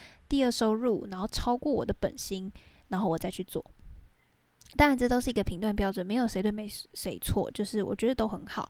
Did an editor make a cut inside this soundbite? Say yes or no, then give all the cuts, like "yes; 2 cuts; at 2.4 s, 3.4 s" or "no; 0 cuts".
no; 0 cuts